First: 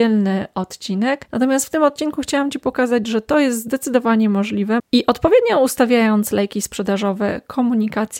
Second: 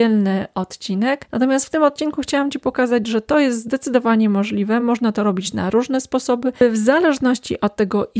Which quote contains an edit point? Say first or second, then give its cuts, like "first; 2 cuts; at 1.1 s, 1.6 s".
first; 1 cut; at 4.8 s